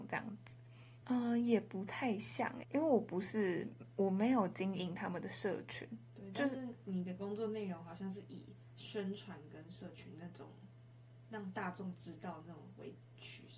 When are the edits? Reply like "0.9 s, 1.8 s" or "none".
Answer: 1.0 s, 2.6 s